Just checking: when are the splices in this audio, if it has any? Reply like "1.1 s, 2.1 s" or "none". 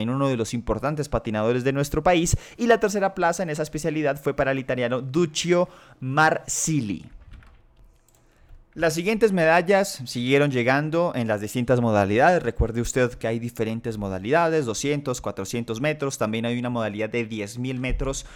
none